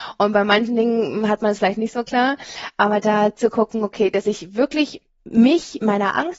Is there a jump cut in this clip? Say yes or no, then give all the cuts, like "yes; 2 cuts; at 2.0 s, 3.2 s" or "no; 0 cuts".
no; 0 cuts